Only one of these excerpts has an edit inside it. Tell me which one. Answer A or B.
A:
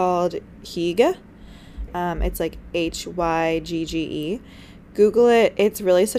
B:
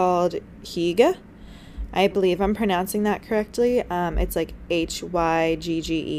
A